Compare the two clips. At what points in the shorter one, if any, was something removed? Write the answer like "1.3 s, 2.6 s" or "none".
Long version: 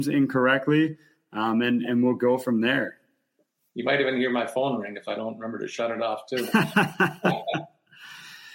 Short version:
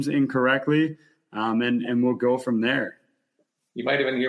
none